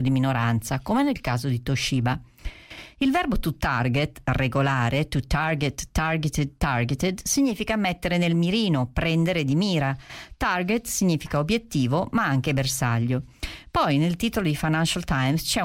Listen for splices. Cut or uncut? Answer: uncut